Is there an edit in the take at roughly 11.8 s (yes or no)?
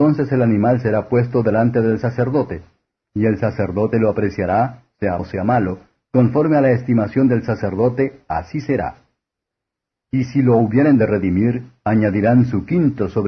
no